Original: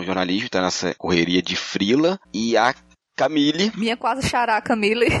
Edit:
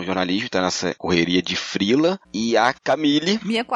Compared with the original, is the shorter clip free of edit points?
no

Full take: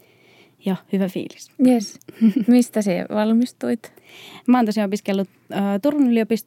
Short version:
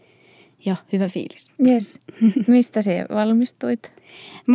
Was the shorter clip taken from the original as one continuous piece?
yes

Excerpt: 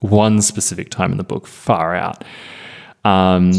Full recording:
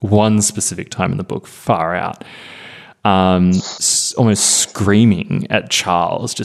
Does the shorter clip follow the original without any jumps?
yes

